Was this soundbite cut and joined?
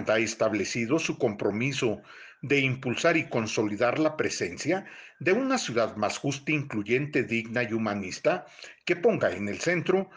no; 0 cuts

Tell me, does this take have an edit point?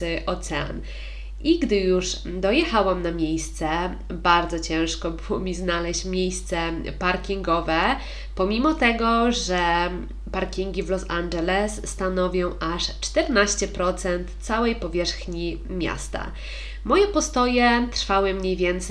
no; 0 cuts

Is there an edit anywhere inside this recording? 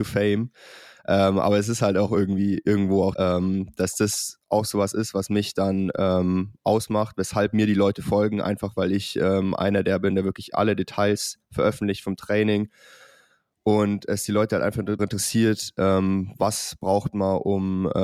yes; 2 cuts; at 3.1 s, 15.0 s

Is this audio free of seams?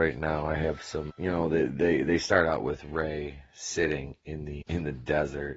no; 2 cuts; at 1.1 s, 4.6 s

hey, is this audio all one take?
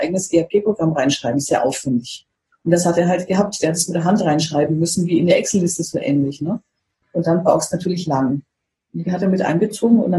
yes; 0 cuts

